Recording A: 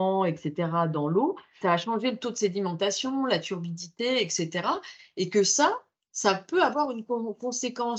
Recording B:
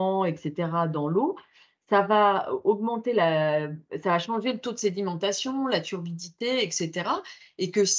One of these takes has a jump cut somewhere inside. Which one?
A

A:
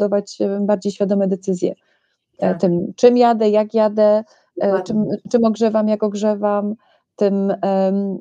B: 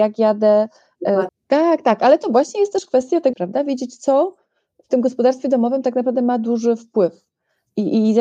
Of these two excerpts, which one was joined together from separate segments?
B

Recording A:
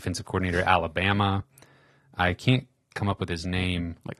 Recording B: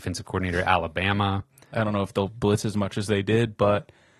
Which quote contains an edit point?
B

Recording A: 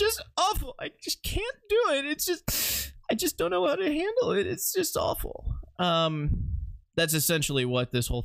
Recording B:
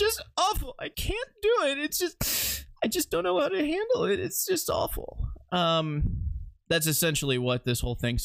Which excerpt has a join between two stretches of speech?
B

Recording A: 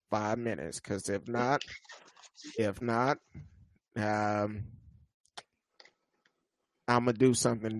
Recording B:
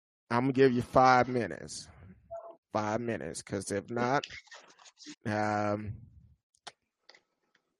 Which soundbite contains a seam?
B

